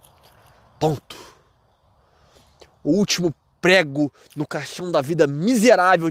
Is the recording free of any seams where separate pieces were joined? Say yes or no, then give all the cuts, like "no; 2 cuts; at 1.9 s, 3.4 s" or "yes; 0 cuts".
yes; 0 cuts